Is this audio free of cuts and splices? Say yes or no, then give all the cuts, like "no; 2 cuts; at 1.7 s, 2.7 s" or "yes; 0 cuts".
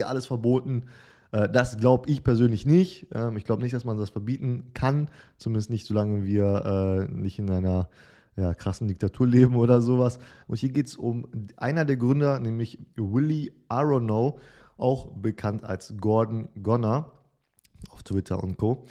no; 1 cut; at 10.4 s